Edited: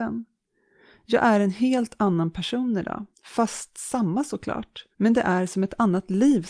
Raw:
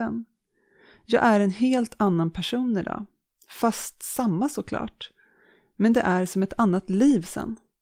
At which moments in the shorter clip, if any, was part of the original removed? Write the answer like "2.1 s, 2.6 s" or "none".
3.1 s, 4.9 s